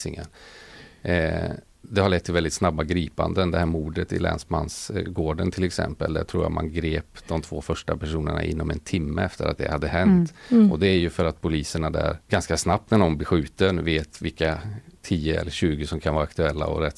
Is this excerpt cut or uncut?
cut